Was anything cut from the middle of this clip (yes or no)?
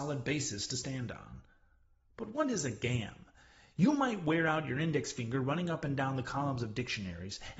no